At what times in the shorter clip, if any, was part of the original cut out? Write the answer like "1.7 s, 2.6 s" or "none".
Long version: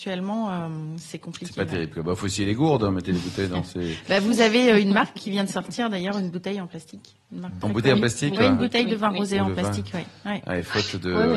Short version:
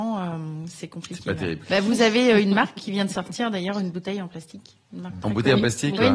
1.6 s